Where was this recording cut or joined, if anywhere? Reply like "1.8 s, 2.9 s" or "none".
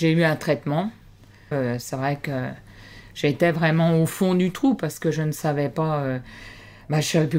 1.5 s